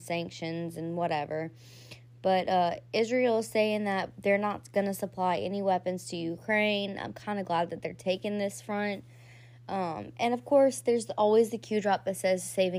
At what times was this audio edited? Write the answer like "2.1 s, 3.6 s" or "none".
none